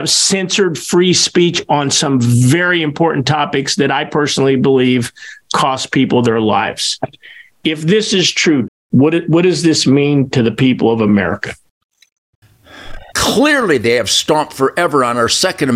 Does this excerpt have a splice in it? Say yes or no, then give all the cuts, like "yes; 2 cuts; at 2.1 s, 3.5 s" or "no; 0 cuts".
yes; 2 cuts; at 8.7 s, 13.1 s